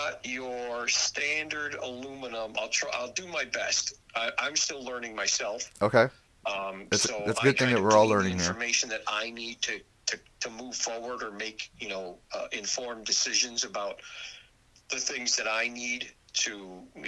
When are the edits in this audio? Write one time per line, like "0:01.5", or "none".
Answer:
none